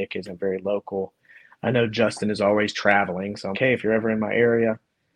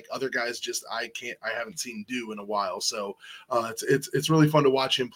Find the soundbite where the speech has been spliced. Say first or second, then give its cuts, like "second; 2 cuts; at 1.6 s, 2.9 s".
first; 1 cut; at 3.5 s